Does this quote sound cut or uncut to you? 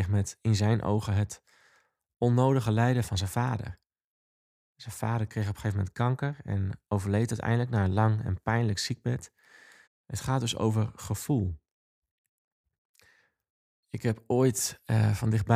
cut